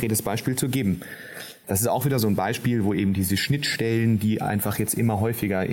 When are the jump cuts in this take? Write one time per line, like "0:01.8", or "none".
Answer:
0:01.6

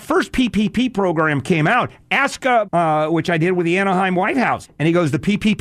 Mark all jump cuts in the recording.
0:02.6
0:04.6

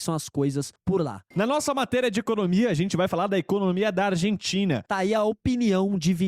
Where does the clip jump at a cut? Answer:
0:01.3
0:04.9

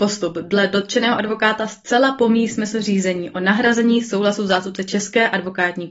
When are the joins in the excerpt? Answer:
none

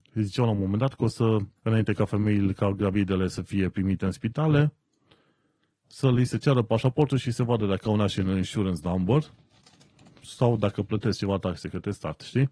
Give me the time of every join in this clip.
0:01.6

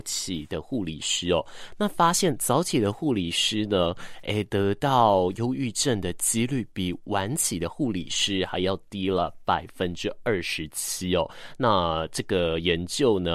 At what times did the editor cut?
none

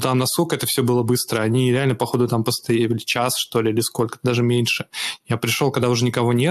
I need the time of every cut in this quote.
none

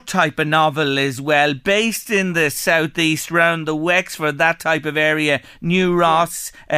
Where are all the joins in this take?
none

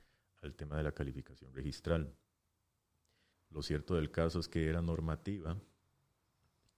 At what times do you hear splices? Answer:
0:03.3

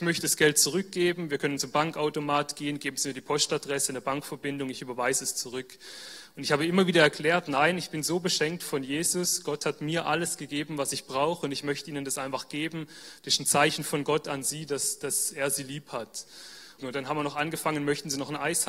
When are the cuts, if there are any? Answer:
0:16.8

